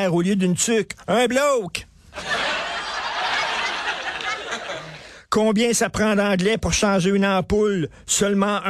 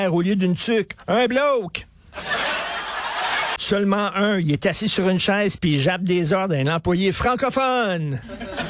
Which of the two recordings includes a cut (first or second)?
second